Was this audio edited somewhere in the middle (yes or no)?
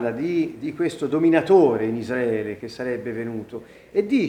no